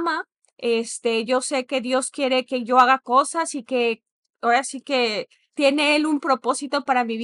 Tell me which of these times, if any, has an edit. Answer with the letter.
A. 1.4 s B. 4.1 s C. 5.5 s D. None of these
C